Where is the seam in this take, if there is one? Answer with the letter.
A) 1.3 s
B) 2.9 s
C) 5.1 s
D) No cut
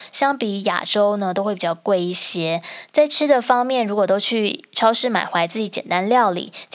D